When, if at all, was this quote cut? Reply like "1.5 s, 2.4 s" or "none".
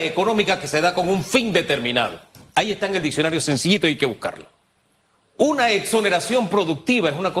none